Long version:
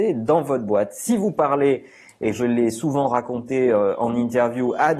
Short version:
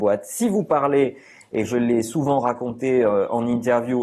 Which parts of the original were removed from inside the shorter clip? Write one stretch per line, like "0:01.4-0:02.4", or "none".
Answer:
none